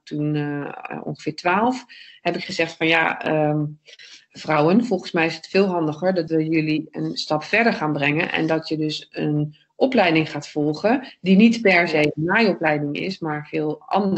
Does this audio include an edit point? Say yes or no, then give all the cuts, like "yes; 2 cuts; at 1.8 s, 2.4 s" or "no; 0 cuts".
no; 0 cuts